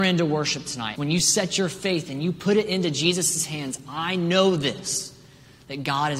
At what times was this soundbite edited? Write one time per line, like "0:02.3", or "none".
0:01.0